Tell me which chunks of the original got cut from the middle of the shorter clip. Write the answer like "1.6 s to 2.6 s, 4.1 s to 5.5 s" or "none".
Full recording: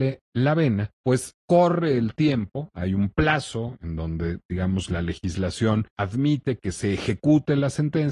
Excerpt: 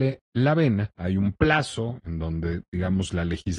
0.9 s to 2.7 s